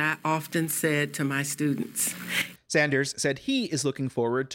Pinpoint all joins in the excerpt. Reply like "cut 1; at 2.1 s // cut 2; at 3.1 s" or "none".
cut 1; at 2.6 s

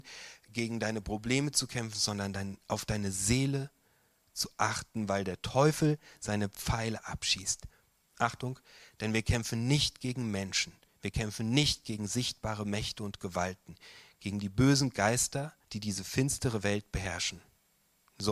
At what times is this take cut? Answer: cut 1; at 8.0 s // cut 2; at 15.6 s

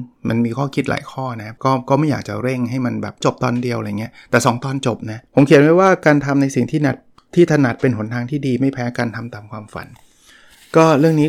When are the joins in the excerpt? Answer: cut 1; at 1.6 s // cut 2; at 3.2 s // cut 3; at 5.3 s

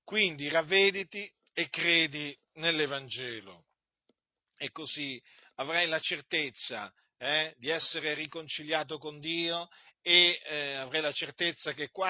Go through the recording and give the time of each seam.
none

